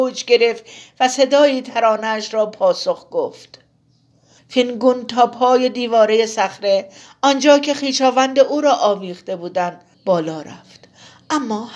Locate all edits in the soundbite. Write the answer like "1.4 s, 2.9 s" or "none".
4.4 s, 9.9 s